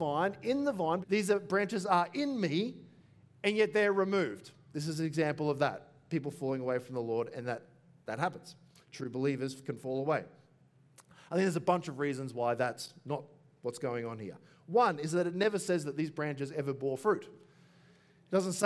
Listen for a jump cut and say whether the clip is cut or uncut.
cut